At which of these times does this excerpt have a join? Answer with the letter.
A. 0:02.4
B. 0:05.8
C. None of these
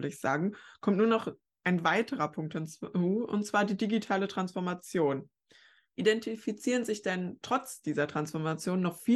C